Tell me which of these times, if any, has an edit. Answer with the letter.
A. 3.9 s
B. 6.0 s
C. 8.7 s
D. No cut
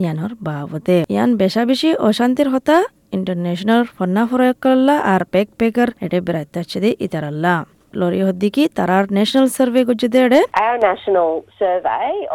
B